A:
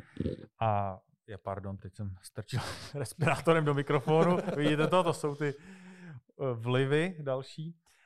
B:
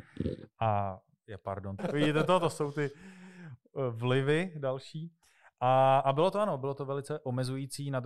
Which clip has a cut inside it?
B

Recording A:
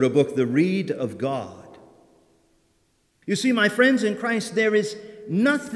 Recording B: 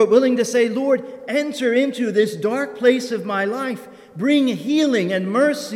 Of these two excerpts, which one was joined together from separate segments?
A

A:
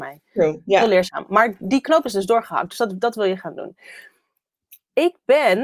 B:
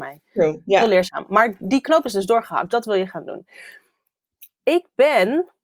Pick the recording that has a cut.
B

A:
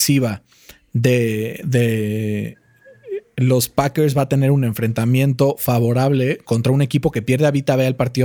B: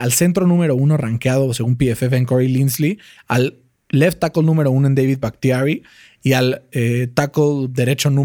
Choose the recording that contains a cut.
A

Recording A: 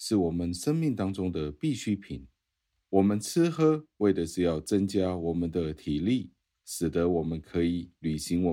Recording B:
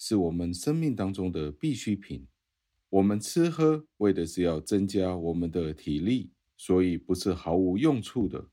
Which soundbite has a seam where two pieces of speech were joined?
B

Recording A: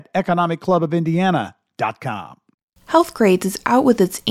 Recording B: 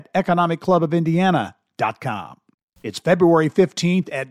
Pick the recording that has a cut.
B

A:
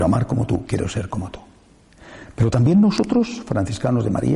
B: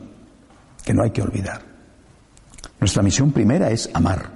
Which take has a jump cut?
B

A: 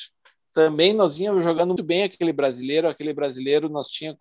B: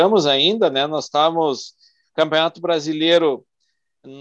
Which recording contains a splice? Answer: A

